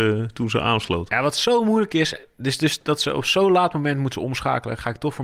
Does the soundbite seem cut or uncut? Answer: uncut